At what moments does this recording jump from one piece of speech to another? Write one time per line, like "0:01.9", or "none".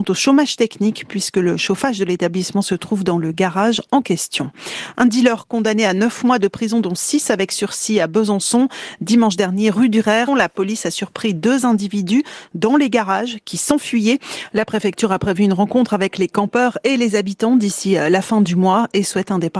0:10.3
0:14.5